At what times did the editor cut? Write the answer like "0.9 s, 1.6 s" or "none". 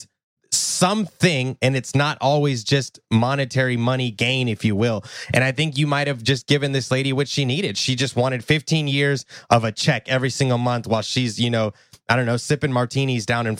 none

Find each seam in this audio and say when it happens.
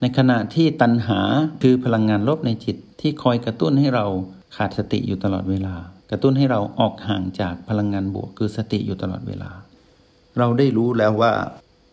2.9 s, 6.0 s

